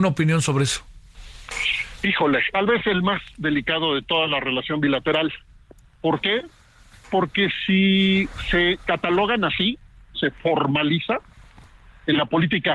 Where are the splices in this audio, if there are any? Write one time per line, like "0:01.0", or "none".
0:02.5
0:10.1